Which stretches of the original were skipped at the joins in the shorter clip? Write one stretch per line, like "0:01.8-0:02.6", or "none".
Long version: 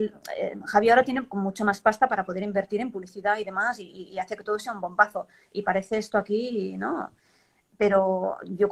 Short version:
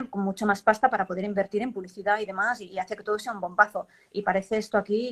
0:03.9-0:04.1